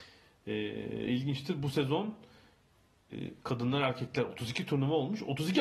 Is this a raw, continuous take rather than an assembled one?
yes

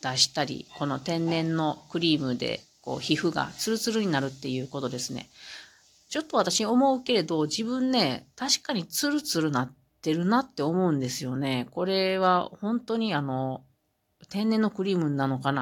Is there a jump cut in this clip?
no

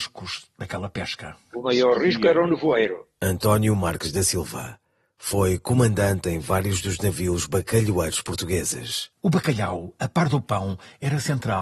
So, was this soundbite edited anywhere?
yes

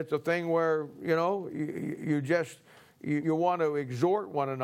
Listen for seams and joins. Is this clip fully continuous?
no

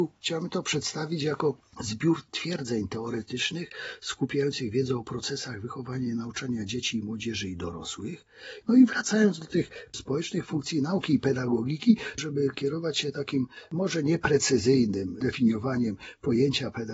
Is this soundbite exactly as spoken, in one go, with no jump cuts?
no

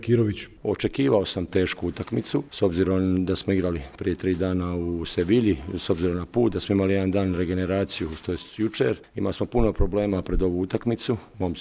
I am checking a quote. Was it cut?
no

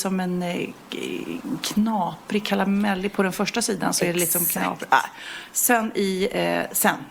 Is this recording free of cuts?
yes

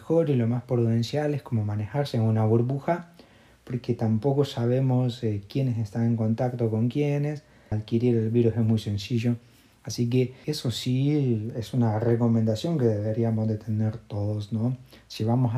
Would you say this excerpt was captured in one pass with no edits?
no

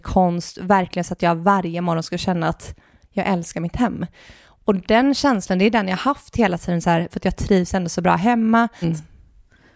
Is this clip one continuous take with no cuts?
no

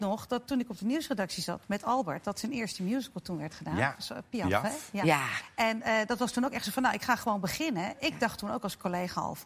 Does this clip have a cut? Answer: no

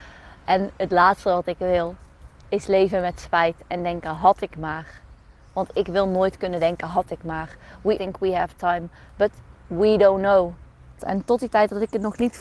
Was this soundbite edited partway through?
yes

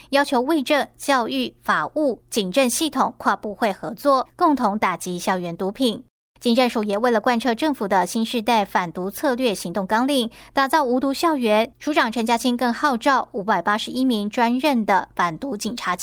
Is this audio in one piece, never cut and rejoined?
yes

